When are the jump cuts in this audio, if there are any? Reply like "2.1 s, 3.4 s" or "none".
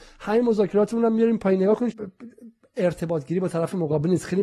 1.9 s